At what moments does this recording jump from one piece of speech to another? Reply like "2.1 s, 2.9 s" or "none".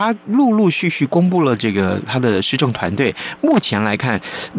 none